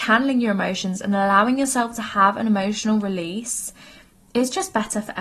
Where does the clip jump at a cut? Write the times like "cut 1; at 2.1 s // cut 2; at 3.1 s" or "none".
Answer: none